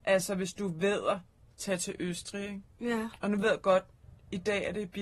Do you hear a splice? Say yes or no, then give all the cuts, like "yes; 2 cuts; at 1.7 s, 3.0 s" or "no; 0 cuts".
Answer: no; 0 cuts